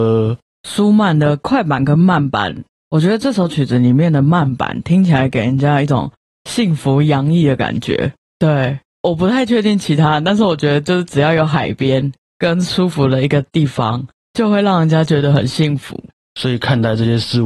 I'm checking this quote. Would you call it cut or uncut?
cut